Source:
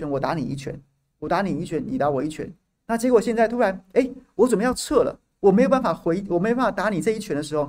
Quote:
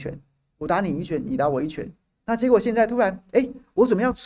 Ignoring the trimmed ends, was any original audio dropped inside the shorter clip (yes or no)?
no